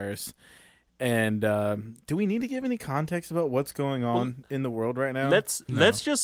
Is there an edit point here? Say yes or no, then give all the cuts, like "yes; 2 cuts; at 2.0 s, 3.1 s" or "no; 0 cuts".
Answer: no; 0 cuts